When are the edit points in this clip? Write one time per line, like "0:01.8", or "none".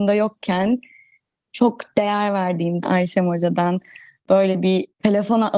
0:02.8